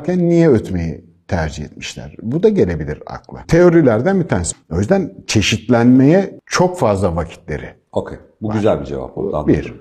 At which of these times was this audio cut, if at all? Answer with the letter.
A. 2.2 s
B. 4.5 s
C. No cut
B